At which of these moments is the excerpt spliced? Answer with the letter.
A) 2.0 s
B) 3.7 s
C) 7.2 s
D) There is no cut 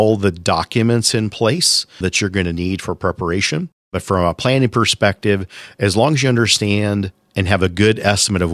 A